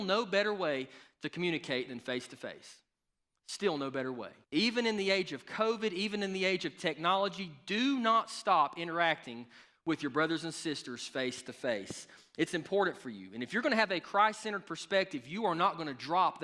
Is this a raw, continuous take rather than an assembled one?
no; 1 cut; at 4.4 s

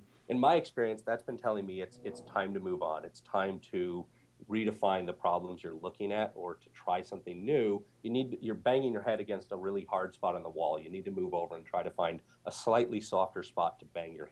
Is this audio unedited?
yes; 0 cuts

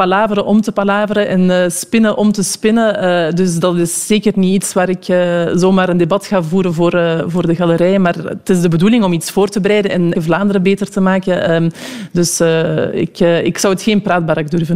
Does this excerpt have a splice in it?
yes; 1 cut; at 10.1 s

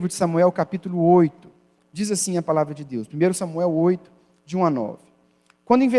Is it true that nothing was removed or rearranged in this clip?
no; 1 cut; at 1.8 s

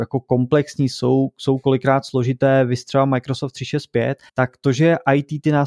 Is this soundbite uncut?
no; 1 cut; at 4.3 s

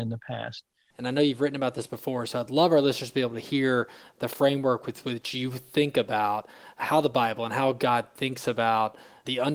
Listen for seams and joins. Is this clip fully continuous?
no; 1 cut; at 0.9 s

